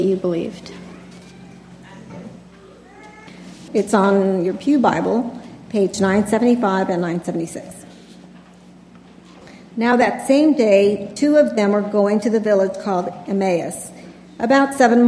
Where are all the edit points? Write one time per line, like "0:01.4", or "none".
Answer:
0:03.7